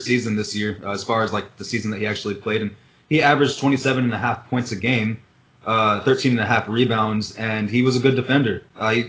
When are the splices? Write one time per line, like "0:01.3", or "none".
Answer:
none